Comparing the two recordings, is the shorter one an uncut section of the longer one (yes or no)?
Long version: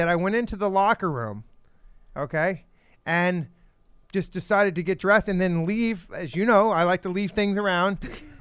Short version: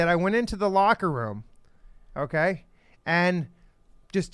yes